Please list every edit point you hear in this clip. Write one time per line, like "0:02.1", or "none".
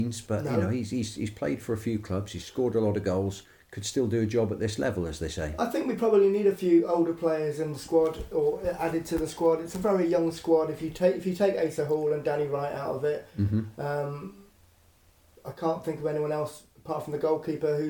none